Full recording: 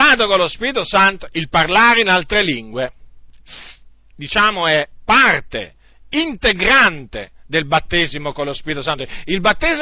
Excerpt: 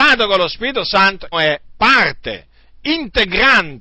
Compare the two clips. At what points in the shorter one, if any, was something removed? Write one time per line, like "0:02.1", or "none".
0:01.3